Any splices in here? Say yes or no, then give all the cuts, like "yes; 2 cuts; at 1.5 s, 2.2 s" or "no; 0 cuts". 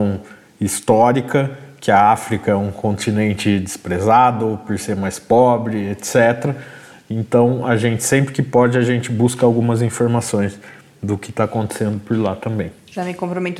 no; 0 cuts